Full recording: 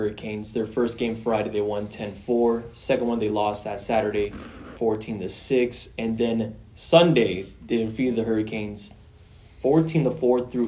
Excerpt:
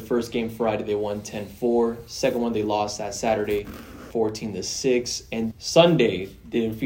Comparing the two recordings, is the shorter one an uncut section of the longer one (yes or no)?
no